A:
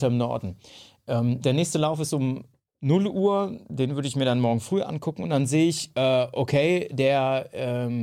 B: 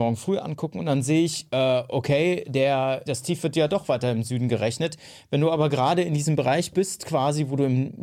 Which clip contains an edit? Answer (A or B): B